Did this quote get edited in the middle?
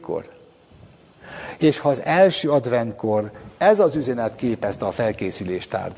no; 0 cuts

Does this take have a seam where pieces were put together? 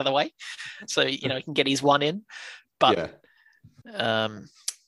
yes; 1 cut; at 3.8 s

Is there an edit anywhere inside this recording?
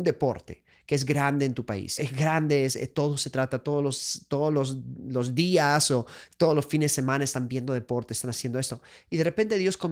yes; 1 cut; at 2.0 s

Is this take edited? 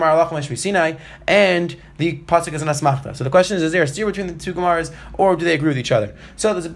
no; 0 cuts

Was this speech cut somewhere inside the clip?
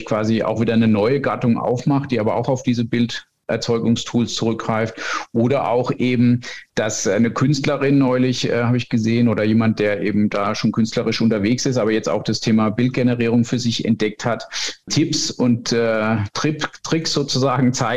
yes; 1 cut; at 14.9 s

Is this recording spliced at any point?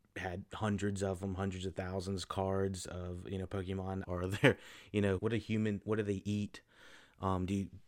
yes; 2 cuts; at 4.0 s, 5.2 s

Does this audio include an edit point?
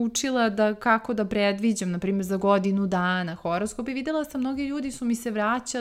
no; 0 cuts

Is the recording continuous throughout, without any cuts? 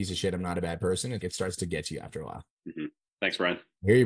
no; 1 cut; at 1.2 s

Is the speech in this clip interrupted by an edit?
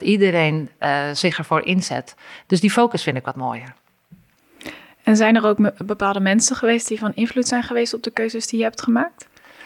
no; 0 cuts

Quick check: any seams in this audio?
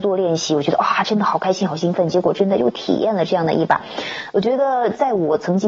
no; 0 cuts

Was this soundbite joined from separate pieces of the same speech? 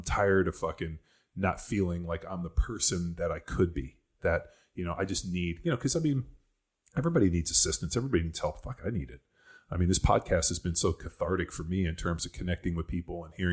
no; 0 cuts

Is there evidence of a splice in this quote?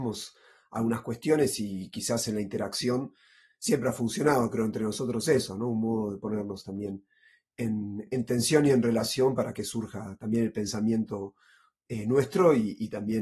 no; 0 cuts

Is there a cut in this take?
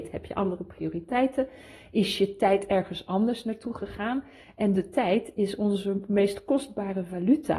no; 0 cuts

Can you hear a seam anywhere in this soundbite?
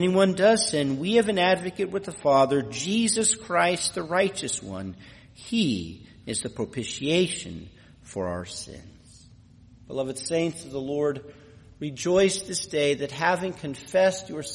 no; 0 cuts

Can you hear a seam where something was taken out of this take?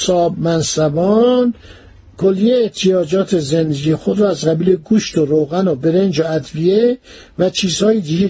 no; 0 cuts

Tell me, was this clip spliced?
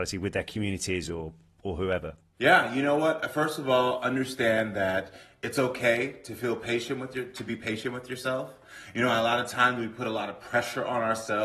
no; 0 cuts

